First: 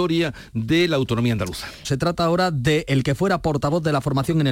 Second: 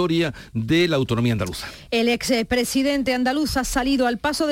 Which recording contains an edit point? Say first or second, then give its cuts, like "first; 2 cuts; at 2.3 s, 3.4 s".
first; 1 cut; at 1.8 s